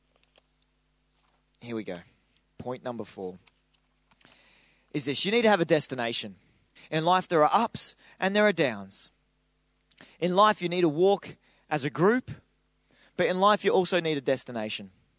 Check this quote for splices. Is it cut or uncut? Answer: cut